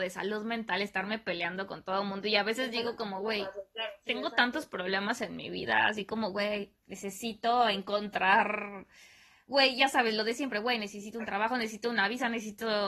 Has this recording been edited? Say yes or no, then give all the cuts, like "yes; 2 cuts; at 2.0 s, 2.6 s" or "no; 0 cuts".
no; 0 cuts